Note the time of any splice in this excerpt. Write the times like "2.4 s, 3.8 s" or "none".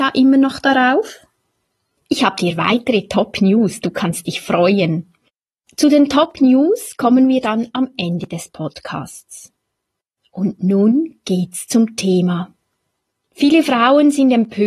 none